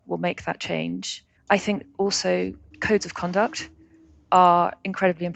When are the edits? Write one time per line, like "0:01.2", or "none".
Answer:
0:01.4